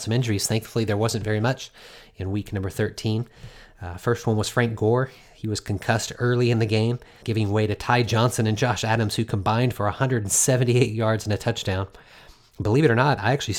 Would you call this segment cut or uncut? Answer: cut